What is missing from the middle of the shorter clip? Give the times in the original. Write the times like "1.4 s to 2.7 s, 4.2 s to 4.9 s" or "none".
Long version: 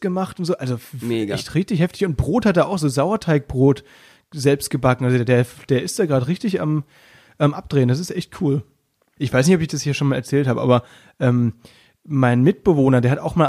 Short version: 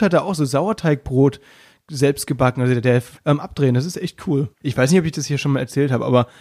5.6 s to 7.3 s, 8.7 s to 9.1 s

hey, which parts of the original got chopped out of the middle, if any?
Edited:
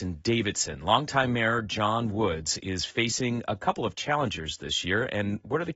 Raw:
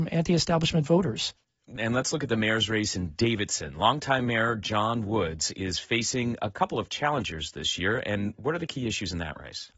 none

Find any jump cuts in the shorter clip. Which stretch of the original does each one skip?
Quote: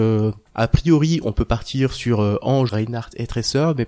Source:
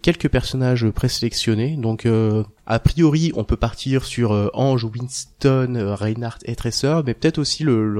4.8 s to 6.0 s

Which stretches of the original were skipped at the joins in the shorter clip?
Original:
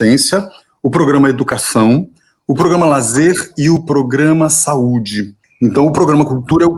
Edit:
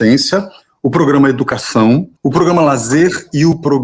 2.2 s to 2.4 s

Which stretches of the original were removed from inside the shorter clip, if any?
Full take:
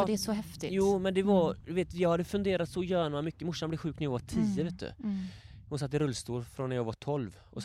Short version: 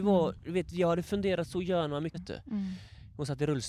3.4 s to 4.7 s

